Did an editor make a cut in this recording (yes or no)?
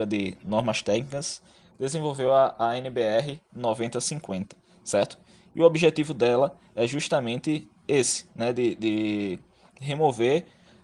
no